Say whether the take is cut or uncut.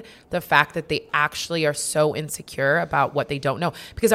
uncut